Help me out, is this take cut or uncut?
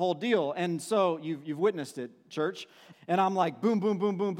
cut